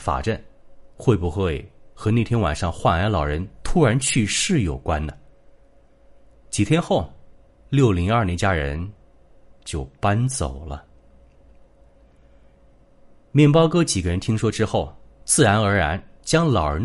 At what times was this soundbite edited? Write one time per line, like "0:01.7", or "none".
0:06.3